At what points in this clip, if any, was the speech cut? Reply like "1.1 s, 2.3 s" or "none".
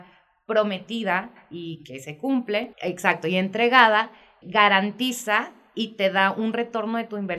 2.7 s, 4.4 s